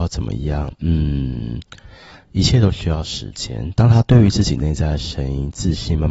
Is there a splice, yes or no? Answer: no